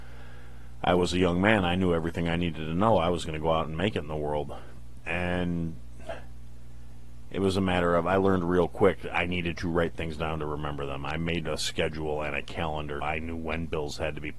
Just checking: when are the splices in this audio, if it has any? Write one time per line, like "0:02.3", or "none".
0:13.0